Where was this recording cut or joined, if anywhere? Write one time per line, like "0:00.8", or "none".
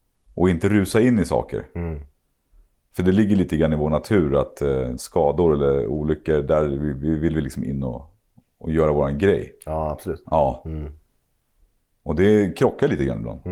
0:05.0
0:10.2